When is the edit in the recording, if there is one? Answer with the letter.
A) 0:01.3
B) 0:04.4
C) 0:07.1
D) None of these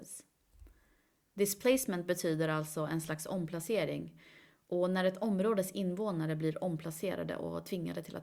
D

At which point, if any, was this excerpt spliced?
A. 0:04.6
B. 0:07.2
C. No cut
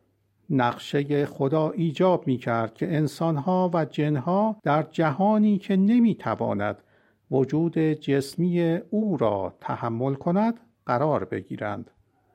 A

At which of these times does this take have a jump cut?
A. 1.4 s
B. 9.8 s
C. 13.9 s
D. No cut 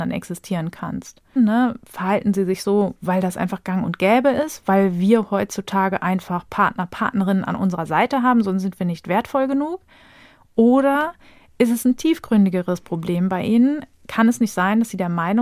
A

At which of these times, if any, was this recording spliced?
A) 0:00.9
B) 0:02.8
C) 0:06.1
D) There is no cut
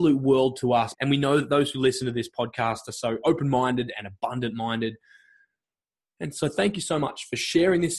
A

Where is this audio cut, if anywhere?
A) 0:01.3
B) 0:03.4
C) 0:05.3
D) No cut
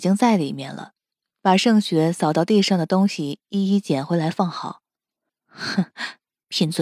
C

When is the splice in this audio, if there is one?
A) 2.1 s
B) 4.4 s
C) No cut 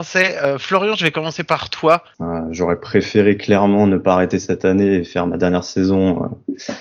A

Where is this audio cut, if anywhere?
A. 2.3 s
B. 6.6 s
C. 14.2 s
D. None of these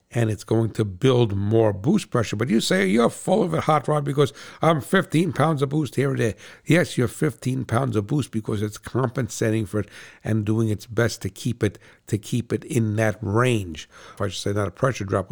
C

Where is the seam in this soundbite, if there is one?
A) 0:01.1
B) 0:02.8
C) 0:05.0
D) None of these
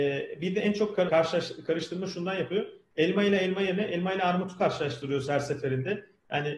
A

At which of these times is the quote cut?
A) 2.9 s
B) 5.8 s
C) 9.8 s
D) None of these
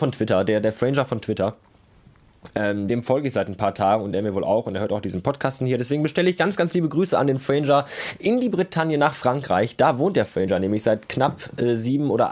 A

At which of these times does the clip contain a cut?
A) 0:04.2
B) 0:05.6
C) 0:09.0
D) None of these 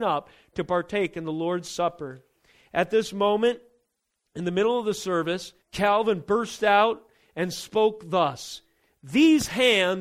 B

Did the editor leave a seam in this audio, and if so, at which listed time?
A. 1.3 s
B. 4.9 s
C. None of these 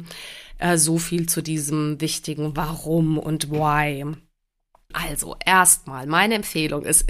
B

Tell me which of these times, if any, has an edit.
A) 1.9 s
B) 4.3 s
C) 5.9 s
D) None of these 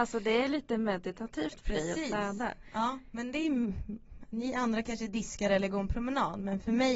D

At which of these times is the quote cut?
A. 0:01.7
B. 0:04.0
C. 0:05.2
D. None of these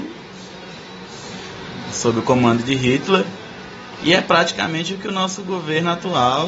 B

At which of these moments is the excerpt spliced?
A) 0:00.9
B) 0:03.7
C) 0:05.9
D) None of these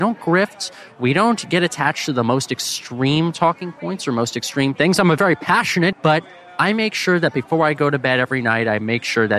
C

